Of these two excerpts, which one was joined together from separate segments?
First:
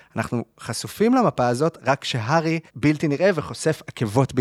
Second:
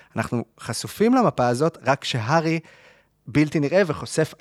first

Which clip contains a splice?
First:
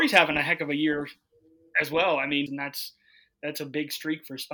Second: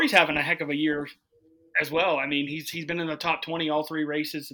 first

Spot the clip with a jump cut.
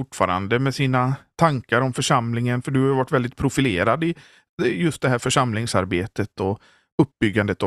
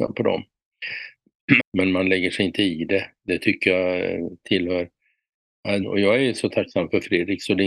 second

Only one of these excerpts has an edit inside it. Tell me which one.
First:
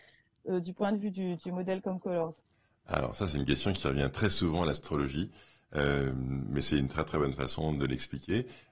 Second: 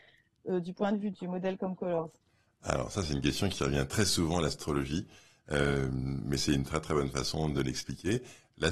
second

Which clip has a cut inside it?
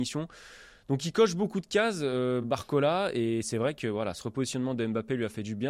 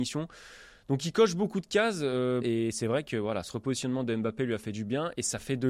second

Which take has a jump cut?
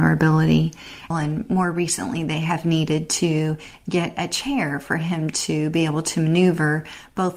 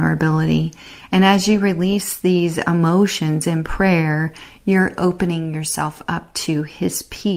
first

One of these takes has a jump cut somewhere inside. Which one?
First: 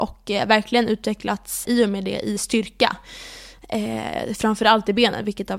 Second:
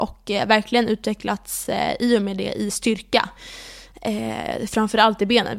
first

